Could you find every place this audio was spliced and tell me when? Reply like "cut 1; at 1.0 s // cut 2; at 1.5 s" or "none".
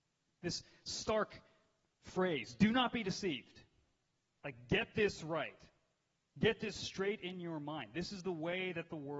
none